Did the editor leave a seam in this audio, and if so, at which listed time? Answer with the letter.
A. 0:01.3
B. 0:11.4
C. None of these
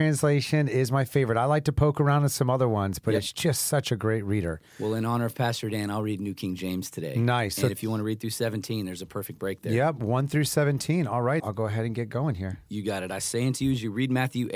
B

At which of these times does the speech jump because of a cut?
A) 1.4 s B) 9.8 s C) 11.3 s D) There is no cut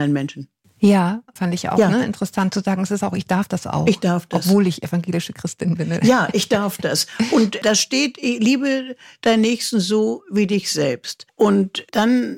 A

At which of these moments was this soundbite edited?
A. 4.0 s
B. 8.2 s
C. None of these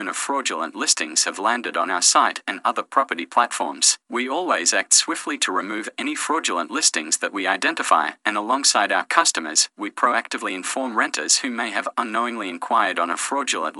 A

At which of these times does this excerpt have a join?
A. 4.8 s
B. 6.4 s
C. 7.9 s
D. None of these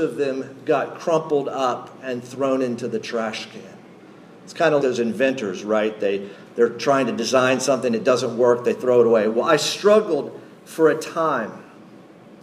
A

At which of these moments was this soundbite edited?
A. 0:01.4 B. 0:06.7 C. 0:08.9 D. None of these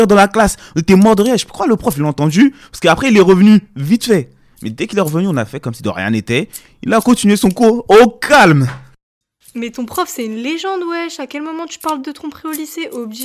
B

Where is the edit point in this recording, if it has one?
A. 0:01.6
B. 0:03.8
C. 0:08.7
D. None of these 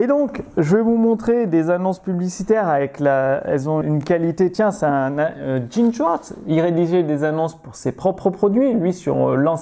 B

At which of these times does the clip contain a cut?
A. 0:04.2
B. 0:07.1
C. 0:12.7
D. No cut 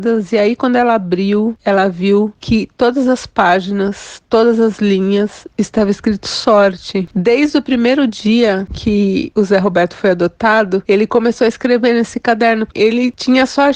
C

